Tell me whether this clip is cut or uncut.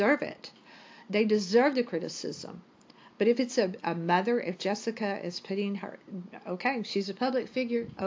uncut